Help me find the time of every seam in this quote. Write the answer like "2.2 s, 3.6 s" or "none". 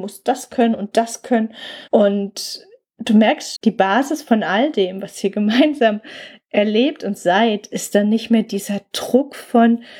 1.9 s, 3.5 s